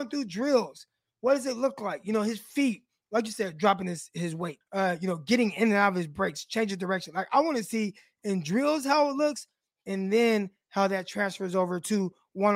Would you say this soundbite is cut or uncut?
cut